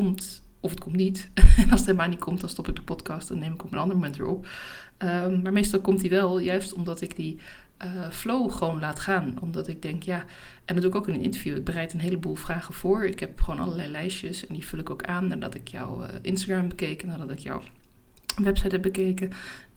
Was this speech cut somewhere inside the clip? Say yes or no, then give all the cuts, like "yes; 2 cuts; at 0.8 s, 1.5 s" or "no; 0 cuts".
no; 0 cuts